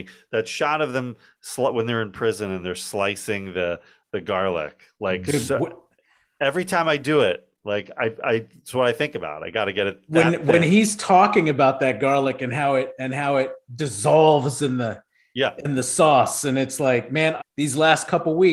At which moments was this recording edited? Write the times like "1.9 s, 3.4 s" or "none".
17.4 s